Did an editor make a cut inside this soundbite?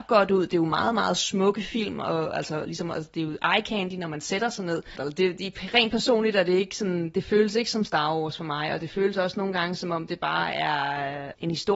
yes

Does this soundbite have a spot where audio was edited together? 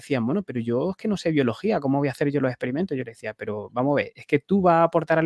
no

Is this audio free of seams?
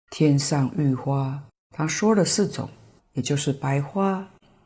no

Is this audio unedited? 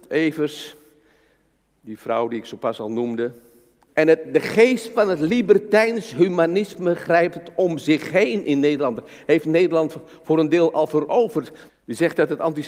no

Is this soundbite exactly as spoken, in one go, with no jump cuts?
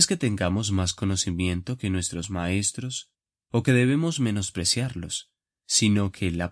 yes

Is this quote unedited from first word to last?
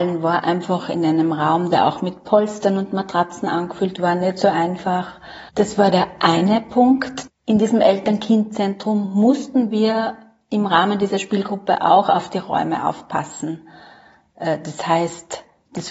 no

